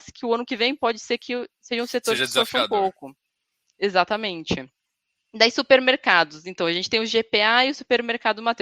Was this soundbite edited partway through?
no; 0 cuts

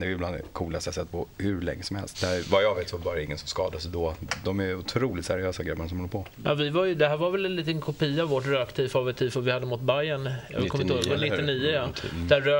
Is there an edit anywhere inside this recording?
yes; 1 cut; at 2.1 s

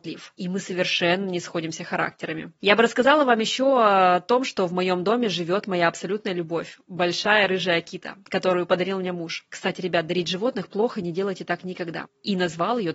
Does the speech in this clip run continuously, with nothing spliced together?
yes; 0 cuts

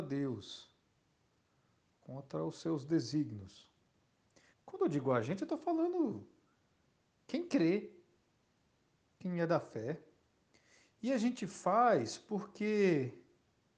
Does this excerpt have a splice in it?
yes; 1 cut; at 4.5 s

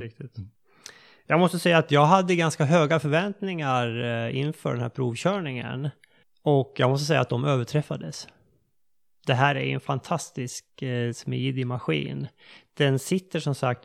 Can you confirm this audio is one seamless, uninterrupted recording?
yes; 0 cuts

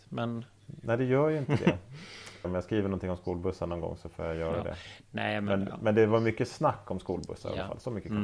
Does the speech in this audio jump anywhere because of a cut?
yes; 1 cut; at 2.4 s

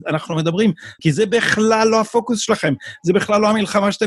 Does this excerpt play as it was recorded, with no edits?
no; 1 cut; at 1.0 s

